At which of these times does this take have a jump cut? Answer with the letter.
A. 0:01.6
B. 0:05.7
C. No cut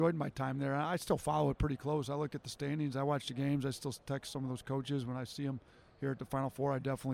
C